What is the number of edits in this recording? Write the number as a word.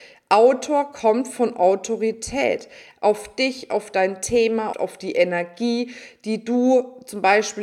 two